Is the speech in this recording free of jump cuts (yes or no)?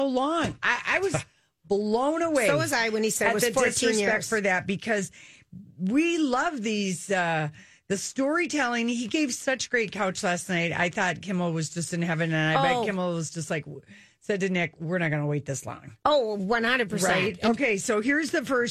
yes